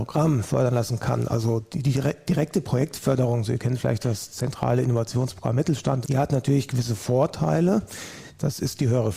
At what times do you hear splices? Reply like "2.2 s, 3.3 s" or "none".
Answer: 6.0 s